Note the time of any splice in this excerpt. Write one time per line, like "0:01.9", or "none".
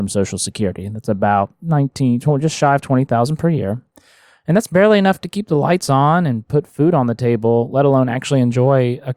none